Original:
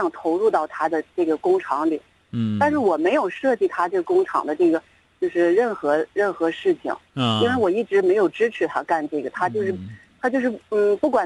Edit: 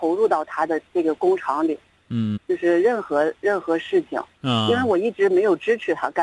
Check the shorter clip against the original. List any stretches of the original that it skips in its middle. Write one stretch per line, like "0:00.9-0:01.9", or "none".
0:02.6-0:05.1

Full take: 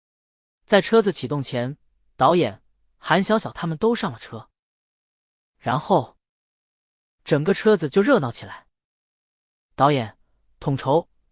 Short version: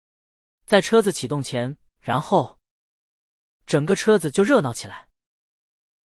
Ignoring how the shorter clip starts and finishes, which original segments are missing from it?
0:01.9-0:05.5

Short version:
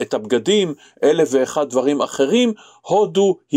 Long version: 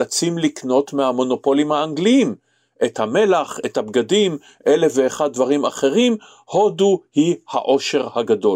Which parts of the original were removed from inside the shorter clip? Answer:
none

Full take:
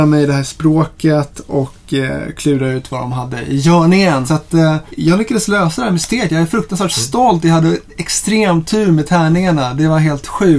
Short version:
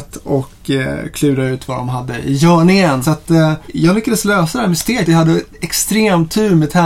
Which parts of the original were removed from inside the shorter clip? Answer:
0:06.3-0:07.4

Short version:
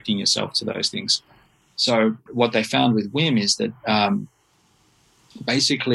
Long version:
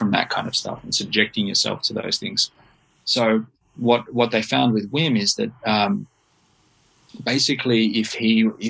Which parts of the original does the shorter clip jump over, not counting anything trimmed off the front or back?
0:03.5-0:04.0

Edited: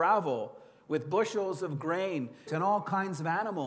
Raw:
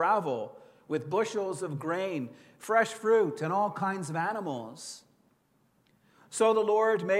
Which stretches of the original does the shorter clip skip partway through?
0:02.5-0:03.4

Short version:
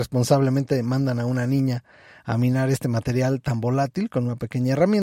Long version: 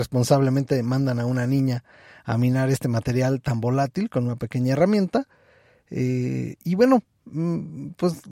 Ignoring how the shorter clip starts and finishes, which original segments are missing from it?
none

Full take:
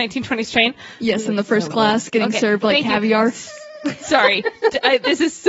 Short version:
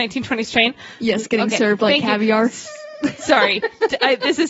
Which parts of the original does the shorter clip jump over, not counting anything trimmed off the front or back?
0:01.2-0:02.1

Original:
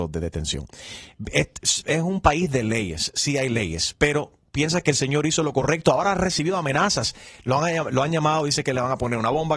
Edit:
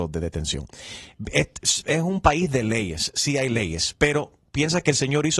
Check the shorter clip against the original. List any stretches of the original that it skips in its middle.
none

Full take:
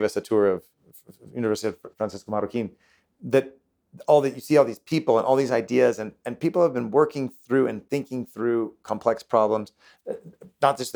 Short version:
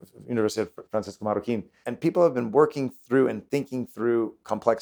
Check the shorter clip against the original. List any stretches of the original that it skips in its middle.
0:02.9-0:06.2

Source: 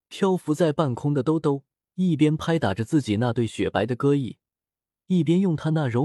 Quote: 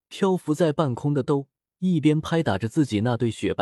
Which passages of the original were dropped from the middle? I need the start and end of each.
0:01.2-0:01.4

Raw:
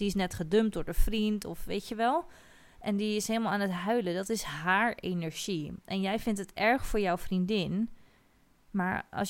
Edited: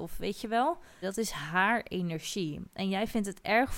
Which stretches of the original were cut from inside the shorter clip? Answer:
0:02.5-0:04.1

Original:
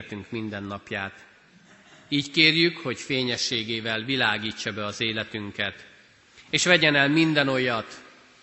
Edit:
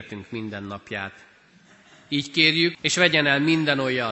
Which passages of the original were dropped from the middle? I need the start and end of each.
0:02.7-0:06.4

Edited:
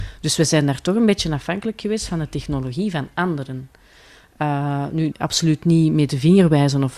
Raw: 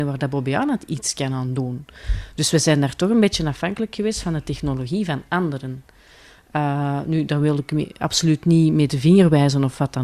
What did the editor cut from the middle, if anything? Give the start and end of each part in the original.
0:07.3-0:07.9

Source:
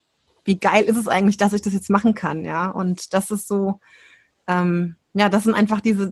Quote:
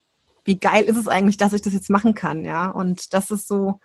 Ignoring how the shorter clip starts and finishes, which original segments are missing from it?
none

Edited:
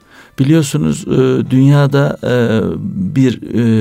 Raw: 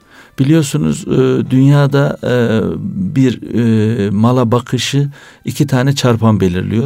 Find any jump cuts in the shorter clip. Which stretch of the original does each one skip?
none

